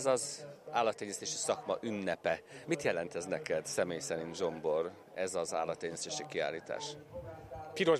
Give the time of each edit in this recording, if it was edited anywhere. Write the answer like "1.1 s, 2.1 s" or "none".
none